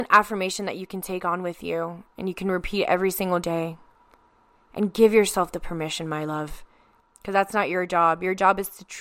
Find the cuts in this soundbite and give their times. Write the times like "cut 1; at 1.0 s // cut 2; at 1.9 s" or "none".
cut 1; at 7.0 s